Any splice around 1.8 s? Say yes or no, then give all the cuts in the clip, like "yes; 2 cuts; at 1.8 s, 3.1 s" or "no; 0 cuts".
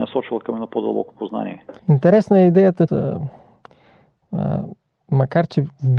yes; 2 cuts; at 1.8 s, 2.9 s